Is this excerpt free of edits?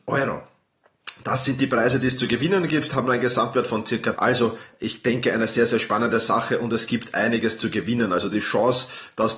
no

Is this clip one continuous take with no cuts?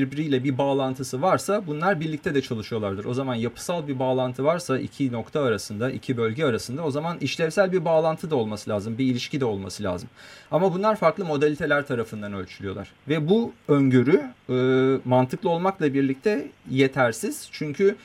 yes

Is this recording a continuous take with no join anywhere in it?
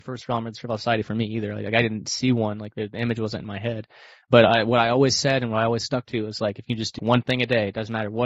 no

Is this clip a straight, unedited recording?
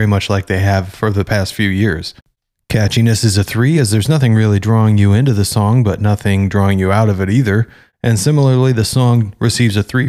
yes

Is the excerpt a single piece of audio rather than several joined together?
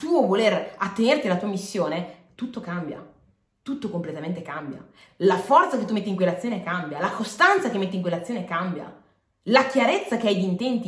yes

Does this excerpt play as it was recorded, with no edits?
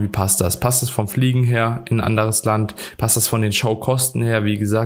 yes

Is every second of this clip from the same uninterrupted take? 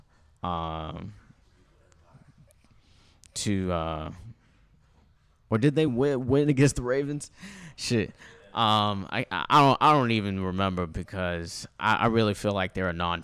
yes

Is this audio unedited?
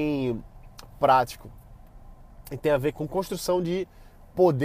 no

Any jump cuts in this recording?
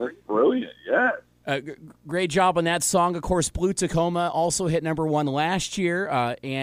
no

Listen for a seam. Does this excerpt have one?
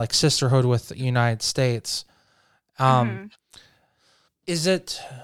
yes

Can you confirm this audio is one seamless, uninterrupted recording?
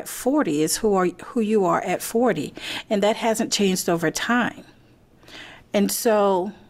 yes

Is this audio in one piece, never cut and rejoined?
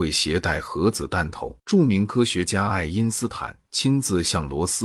no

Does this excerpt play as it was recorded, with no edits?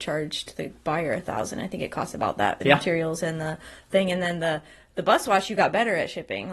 yes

